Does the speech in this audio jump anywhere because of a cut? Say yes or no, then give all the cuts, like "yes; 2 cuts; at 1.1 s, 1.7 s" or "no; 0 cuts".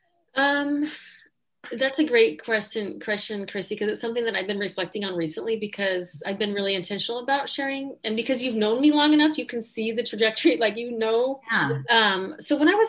yes; 1 cut; at 11.8 s